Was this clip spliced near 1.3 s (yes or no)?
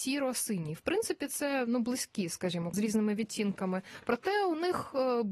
no